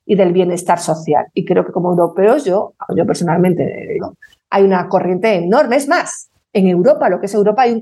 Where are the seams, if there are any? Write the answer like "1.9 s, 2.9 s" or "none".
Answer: 2.9 s, 4.0 s

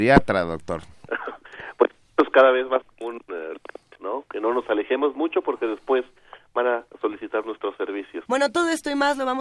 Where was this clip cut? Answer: 4.0 s, 8.3 s

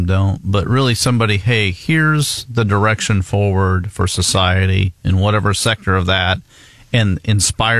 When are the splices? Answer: none

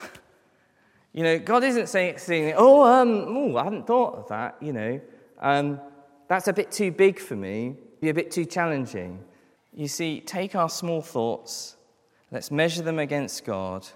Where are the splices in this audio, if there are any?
8.0 s, 9.6 s

